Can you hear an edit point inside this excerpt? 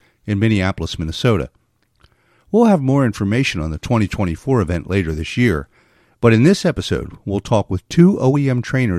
no; 0 cuts

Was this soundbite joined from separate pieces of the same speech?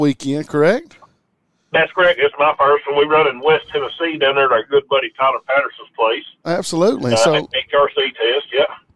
no; 0 cuts

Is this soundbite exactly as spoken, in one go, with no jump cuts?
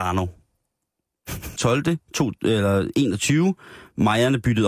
no; 1 cut; at 1.6 s

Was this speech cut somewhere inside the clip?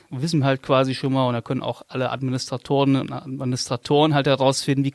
no; 0 cuts

